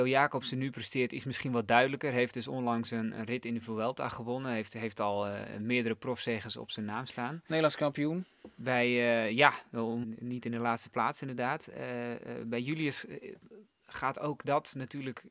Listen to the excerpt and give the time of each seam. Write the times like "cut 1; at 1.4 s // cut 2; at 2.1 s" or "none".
cut 1; at 10.0 s

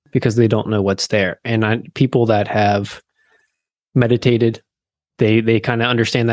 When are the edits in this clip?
none

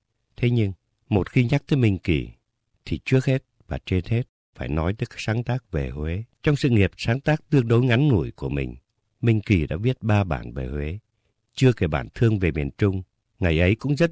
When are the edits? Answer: cut 1; at 6.3 s

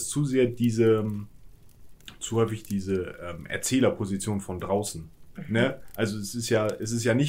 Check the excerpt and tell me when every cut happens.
none

